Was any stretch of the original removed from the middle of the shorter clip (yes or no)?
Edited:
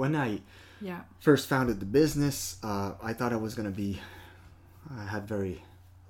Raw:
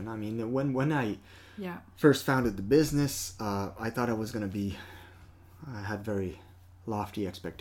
no